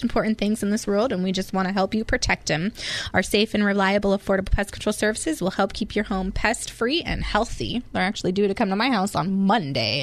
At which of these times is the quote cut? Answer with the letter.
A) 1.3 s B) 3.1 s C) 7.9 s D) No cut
D